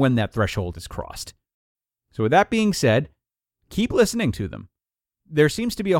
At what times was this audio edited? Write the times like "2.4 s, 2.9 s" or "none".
none